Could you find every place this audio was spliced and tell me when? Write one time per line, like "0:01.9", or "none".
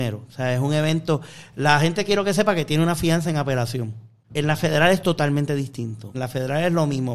0:04.3
0:06.1